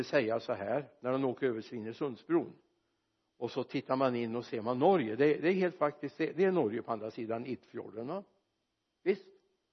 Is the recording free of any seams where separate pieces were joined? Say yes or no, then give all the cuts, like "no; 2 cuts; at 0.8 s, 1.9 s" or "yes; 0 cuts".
yes; 0 cuts